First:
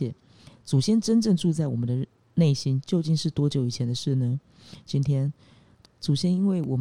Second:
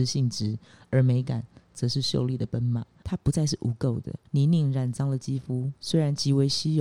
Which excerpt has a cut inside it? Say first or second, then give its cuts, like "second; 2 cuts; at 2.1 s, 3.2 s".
second; 2 cuts; at 3.0 s, 4.3 s